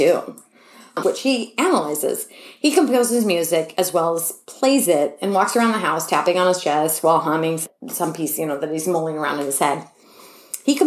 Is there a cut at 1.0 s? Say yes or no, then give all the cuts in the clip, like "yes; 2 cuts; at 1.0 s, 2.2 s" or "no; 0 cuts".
yes; 1 cut; at 1.0 s